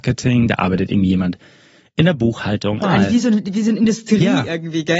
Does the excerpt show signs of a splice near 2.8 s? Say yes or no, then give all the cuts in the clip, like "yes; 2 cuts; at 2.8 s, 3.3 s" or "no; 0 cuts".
yes; 1 cut; at 2.8 s